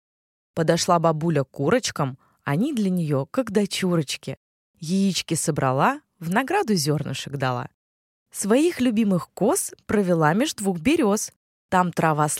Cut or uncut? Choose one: uncut